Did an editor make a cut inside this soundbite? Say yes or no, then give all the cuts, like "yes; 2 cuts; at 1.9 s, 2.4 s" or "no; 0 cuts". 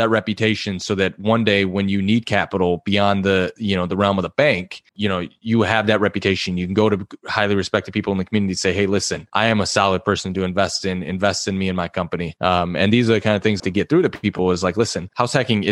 yes; 2 cuts; at 4.9 s, 13.6 s